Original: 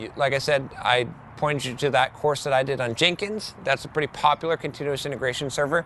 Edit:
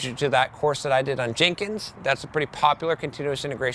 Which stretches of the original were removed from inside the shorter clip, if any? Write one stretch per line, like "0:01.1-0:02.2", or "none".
none